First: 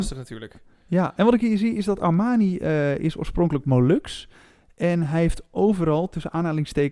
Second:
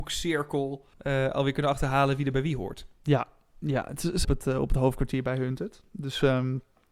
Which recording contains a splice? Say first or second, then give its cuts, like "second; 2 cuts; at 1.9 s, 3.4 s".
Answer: second; 2 cuts; at 0.9 s, 4.2 s